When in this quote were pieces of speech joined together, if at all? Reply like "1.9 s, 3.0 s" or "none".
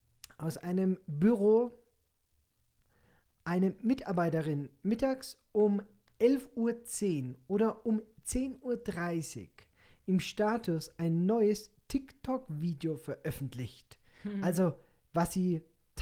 none